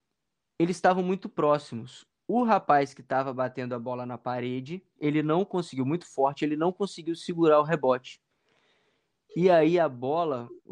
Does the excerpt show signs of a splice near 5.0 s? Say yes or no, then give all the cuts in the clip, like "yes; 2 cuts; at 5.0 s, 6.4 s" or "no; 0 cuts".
yes; 1 cut; at 5.0 s